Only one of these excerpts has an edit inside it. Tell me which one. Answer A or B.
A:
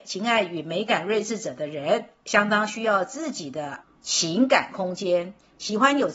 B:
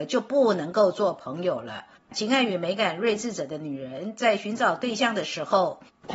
B